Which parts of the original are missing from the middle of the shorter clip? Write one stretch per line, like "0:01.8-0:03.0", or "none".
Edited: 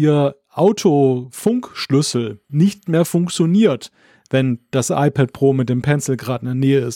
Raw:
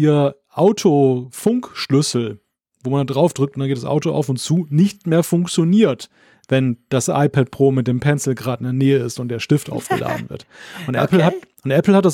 0:02.5-0:04.7